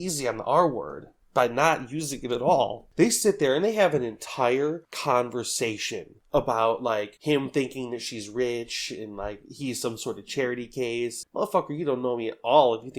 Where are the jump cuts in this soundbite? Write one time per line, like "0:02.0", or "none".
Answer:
0:02.9
0:11.2